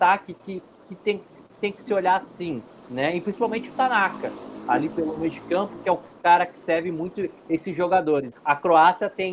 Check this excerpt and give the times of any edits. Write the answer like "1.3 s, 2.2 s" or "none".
8.3 s